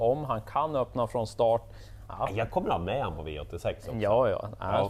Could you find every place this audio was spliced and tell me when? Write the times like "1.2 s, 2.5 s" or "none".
2.1 s